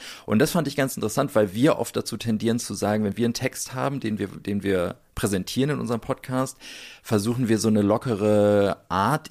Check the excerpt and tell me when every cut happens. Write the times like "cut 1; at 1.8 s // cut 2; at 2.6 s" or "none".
none